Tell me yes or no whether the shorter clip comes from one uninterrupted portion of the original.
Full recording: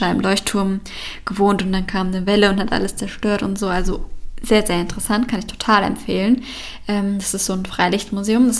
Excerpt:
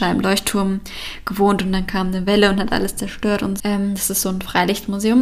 no